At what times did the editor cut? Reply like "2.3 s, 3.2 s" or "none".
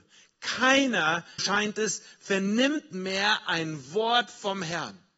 1.4 s